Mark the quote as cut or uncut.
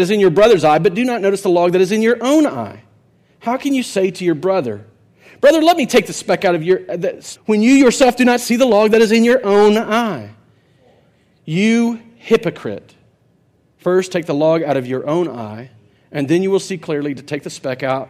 cut